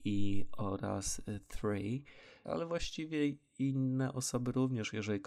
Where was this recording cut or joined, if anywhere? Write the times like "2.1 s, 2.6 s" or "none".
2.4 s